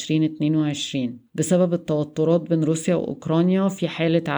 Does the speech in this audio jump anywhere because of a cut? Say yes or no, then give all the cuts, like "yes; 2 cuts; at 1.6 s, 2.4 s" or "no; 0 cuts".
yes; 1 cut; at 1.3 s